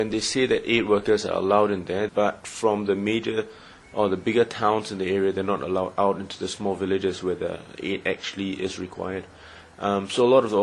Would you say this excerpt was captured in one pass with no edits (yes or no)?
no